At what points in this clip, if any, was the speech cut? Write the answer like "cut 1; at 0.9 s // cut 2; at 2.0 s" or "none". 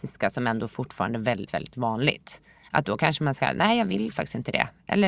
cut 1; at 1.5 s